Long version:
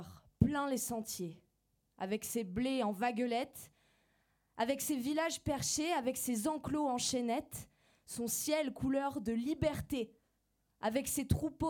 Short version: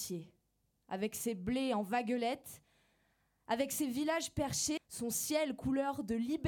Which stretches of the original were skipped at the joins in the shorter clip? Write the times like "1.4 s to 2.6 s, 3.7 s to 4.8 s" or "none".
5.9 s to 7.9 s

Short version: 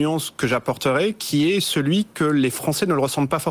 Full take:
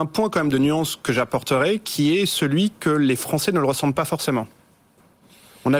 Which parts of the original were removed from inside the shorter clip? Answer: none

